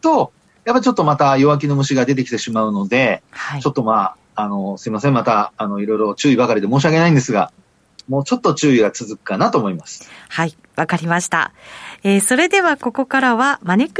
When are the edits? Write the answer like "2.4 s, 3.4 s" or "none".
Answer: none